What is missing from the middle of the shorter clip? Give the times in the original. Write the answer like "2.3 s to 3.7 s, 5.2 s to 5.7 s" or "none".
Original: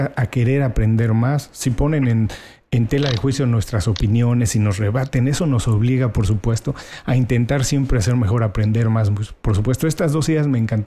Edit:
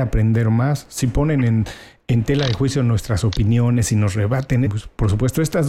5.3 s to 9.1 s